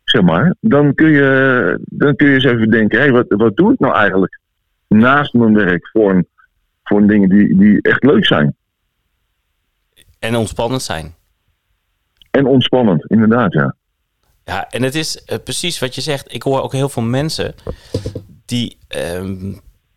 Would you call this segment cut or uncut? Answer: uncut